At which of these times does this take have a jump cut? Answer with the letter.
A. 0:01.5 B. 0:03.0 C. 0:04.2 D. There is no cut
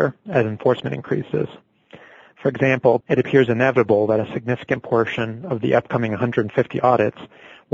B